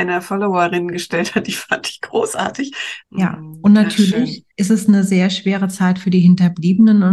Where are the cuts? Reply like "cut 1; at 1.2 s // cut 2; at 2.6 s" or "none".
cut 1; at 3.0 s // cut 2; at 4.5 s